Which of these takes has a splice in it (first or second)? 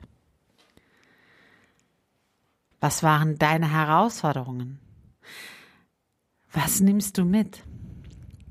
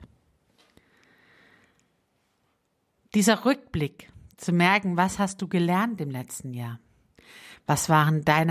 first